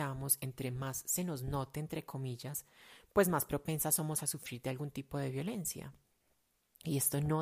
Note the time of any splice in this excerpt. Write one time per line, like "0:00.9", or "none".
none